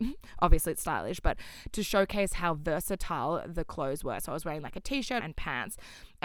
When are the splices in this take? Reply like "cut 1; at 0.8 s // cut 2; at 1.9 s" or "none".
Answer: cut 1; at 5.2 s